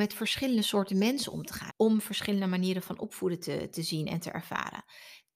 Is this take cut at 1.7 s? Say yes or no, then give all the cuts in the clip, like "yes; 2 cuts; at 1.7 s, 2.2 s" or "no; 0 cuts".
yes; 1 cut; at 1.7 s